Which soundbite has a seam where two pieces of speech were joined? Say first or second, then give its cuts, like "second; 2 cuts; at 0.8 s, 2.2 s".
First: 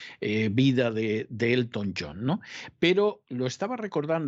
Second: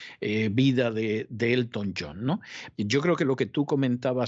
second; 1 cut; at 2.8 s